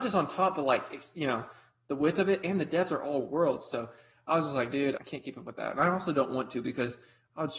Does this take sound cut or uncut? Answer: cut